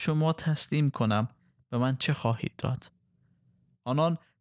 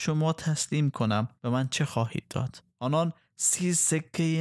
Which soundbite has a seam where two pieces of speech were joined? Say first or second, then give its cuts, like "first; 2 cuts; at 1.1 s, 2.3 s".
second; 2 cuts; at 1.4 s, 2.7 s